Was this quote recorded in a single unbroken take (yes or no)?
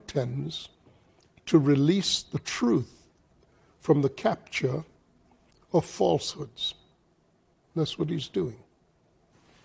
yes